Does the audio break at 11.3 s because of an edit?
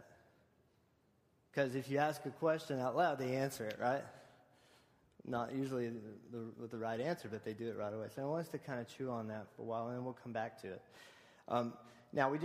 no; 1 cut; at 8.1 s

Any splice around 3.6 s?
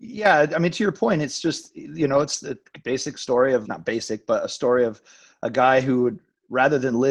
yes; 1 cut; at 3.6 s

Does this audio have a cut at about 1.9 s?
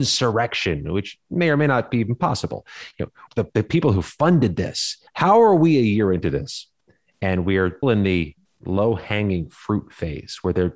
no; 3 cuts; at 3.3 s, 5.1 s, 7.8 s

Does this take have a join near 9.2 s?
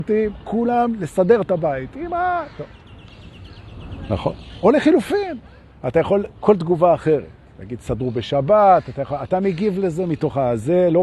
no; 0 cuts

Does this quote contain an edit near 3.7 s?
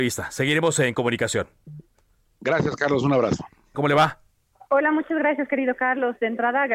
yes; 1 cut; at 3.7 s

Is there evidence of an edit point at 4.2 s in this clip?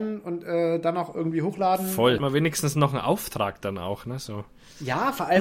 no; 1 cut; at 2.2 s

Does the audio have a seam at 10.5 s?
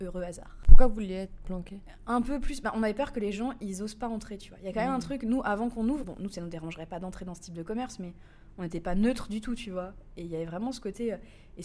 no; 1 cut; at 6.0 s

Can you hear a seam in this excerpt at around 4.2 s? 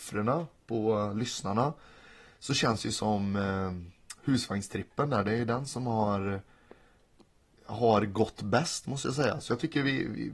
no; 0 cuts

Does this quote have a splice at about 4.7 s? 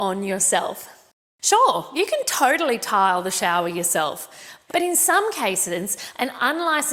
yes; 1 cut; at 4.7 s

